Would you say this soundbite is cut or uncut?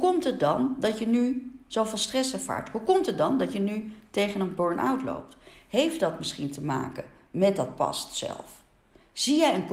uncut